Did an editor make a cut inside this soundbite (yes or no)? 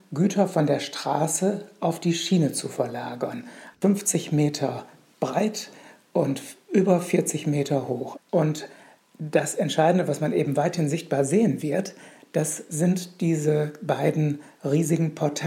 yes